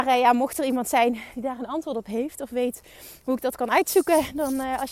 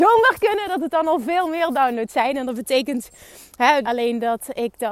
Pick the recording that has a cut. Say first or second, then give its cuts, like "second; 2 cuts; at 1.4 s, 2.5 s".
second; 1 cut; at 3.8 s